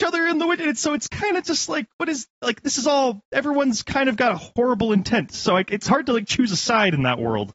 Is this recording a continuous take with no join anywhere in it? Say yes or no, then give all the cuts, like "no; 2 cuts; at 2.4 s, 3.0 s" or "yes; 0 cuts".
yes; 0 cuts